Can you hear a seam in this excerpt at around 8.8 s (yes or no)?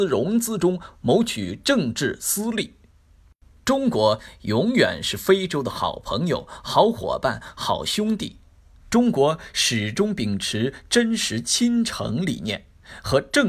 yes